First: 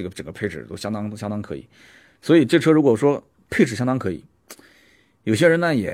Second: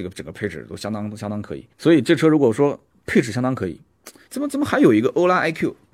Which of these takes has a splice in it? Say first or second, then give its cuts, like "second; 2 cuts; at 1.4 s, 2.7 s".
second; 2 cuts; at 1.7 s, 4.3 s